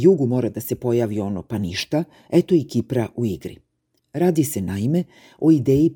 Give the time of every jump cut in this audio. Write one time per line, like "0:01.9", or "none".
none